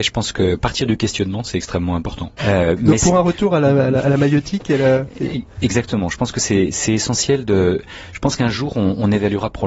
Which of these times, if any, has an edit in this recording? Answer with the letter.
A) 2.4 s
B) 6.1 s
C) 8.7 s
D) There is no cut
A